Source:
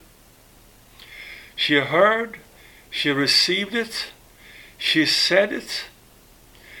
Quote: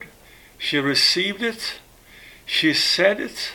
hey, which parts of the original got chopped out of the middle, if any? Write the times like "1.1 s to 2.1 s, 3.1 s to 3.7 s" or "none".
none